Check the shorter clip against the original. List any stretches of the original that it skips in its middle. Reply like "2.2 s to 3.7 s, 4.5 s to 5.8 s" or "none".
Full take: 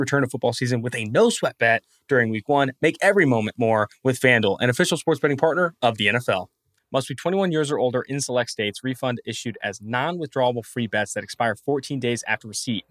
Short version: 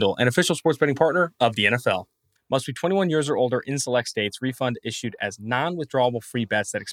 none